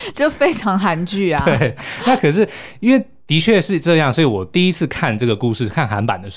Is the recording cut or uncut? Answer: uncut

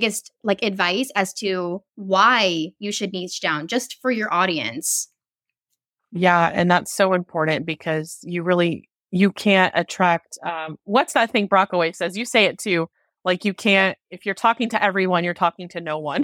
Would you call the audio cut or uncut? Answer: cut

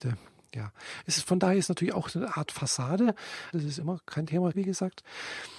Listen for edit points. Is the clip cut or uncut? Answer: cut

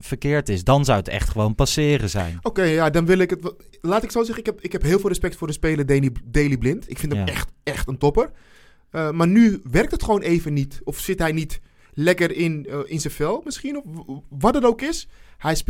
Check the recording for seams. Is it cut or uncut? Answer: uncut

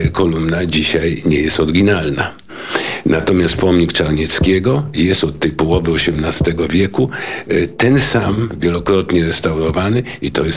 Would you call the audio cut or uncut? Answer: uncut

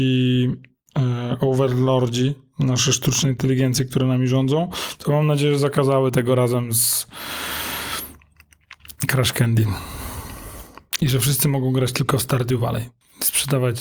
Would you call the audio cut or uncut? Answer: uncut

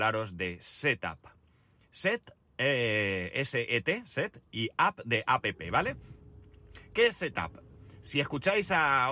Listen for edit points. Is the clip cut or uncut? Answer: uncut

